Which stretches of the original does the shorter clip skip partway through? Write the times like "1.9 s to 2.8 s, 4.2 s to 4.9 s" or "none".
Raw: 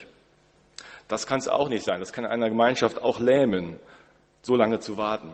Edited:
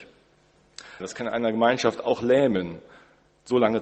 1.0 s to 2.0 s